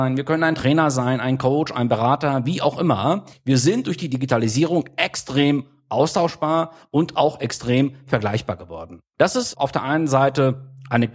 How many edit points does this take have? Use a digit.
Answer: 2